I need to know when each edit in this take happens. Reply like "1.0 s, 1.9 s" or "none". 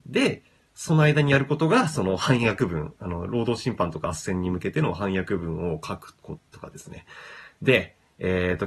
6.4 s